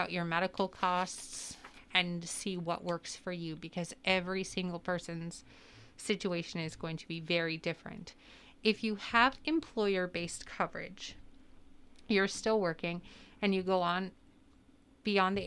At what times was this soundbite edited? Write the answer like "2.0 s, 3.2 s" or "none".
none